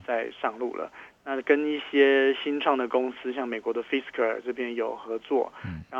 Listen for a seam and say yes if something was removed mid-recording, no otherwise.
no